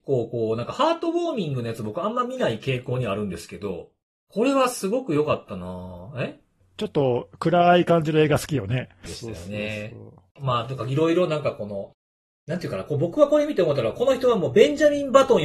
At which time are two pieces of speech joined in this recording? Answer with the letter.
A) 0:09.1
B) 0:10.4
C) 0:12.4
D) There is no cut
A